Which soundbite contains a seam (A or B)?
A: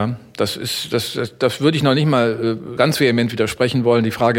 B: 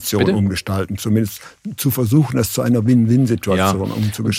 A